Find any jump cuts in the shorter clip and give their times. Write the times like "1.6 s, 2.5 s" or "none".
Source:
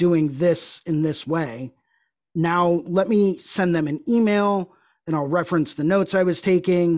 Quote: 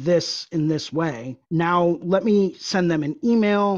1.4 s

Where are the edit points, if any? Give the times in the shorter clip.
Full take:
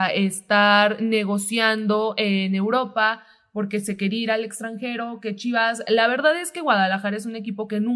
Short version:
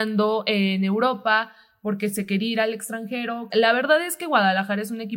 3.5 s

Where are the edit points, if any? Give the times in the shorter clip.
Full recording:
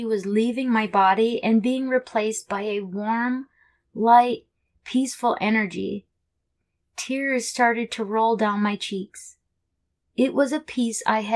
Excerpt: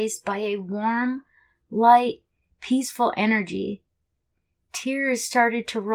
none

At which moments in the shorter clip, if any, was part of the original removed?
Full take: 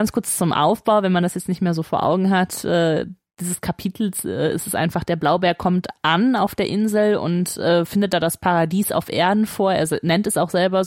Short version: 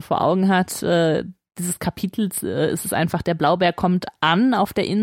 none

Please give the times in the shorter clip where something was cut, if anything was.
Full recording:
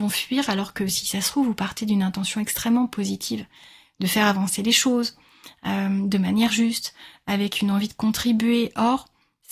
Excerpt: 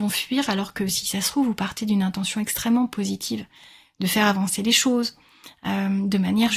none

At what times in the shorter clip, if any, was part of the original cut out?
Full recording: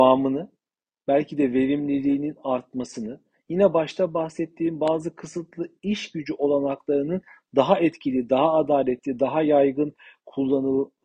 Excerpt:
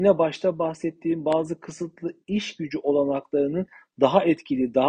none

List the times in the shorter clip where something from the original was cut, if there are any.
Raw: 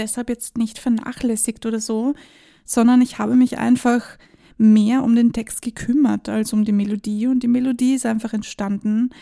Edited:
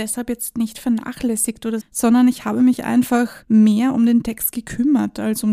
1.8 s, 3.4 s

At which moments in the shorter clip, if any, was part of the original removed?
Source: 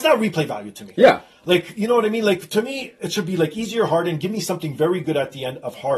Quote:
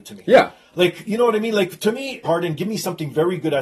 2.2 s

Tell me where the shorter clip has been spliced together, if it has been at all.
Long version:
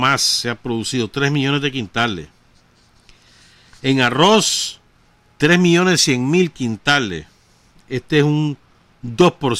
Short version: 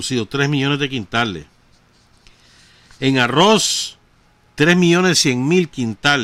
none

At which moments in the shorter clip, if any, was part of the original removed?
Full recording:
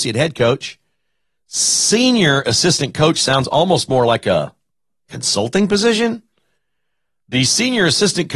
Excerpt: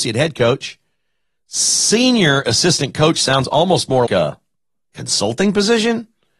4.1 s

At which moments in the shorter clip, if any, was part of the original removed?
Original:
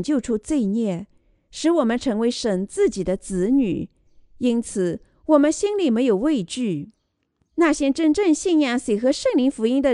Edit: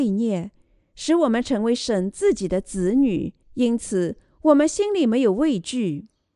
3.4 s

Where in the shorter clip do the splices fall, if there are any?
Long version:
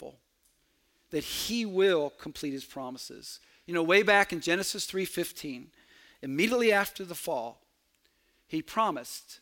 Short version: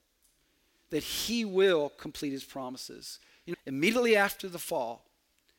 3.5 s

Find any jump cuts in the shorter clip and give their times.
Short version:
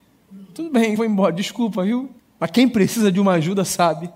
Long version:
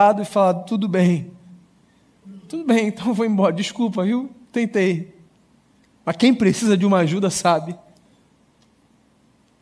1.0 s, 2.2 s

